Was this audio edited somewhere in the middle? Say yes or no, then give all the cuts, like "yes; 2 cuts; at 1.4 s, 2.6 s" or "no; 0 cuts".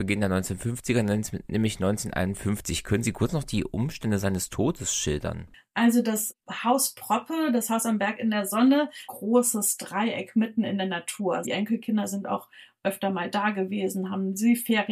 yes; 2 cuts; at 9.1 s, 11.4 s